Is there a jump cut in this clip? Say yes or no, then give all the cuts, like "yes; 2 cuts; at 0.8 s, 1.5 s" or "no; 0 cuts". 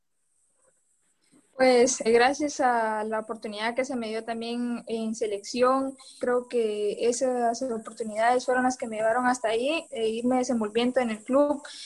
yes; 3 cuts; at 2.1 s, 6.2 s, 9.9 s